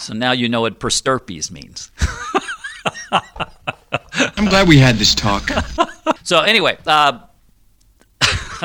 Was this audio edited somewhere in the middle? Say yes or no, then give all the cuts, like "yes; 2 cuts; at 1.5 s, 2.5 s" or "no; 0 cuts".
yes; 1 cut; at 6.2 s